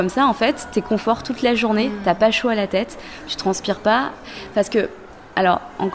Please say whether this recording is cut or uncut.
uncut